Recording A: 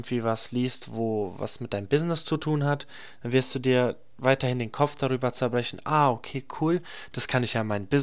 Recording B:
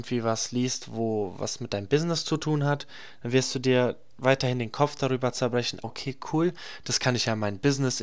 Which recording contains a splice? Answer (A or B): B